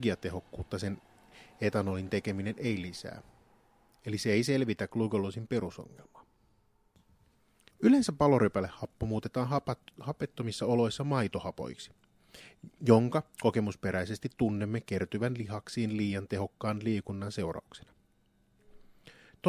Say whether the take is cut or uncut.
cut